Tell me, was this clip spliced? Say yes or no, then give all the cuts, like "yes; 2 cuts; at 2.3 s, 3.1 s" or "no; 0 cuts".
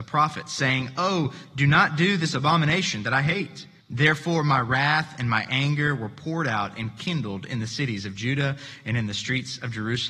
yes; 1 cut; at 3.8 s